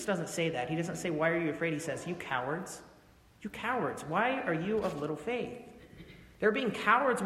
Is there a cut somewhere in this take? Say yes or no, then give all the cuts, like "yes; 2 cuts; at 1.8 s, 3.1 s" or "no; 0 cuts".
no; 0 cuts